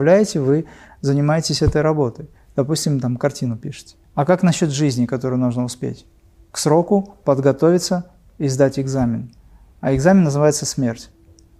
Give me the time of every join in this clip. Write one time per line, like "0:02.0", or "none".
0:04.0